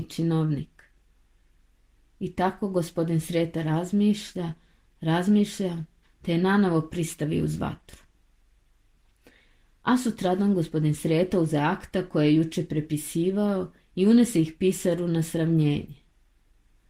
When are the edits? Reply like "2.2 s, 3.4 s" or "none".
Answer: 6.0 s

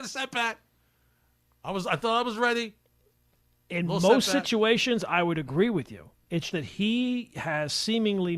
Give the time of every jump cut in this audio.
6.5 s

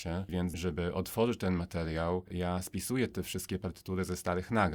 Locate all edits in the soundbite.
none

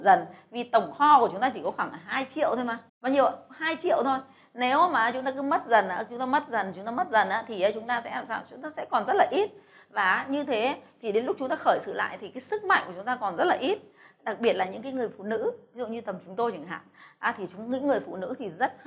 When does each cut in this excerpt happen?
2.9 s

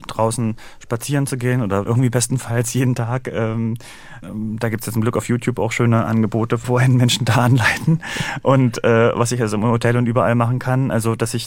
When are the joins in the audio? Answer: 1.9 s

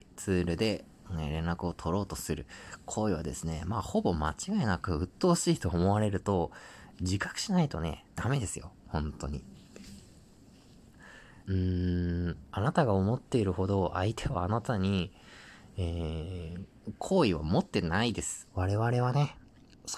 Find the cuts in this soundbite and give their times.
11.4 s, 18.5 s

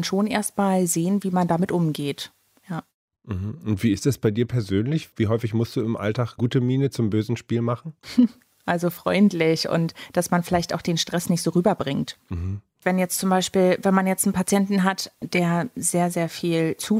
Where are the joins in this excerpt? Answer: 8.0 s

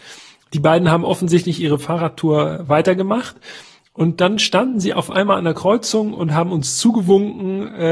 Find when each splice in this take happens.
none

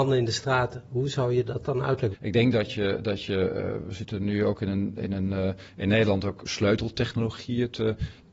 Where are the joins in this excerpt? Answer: 2.1 s

